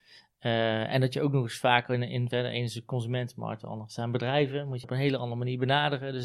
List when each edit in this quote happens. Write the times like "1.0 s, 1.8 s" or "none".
2.3 s, 4.8 s